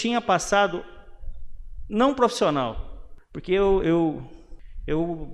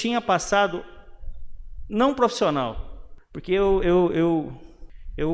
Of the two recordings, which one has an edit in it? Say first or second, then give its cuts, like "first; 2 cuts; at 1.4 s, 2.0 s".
first; 1 cut; at 3.8 s